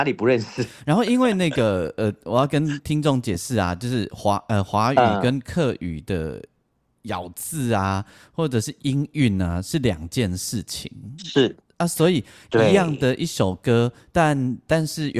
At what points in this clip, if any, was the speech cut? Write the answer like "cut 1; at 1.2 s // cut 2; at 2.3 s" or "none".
none

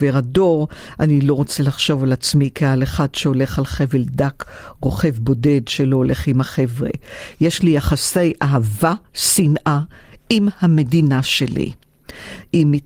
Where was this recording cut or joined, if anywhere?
none

